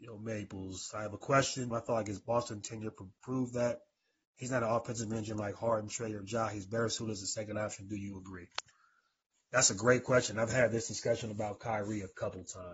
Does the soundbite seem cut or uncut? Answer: cut